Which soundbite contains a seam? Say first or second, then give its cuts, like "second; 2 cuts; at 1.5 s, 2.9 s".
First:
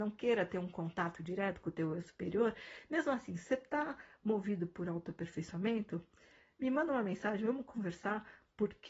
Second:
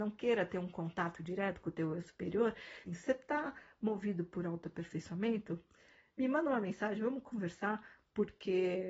second; 1 cut; at 2.9 s